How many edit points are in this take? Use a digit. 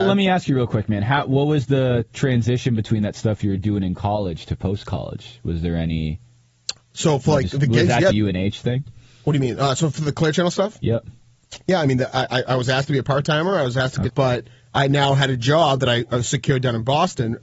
2